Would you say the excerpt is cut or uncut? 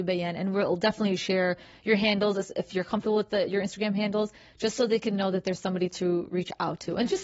uncut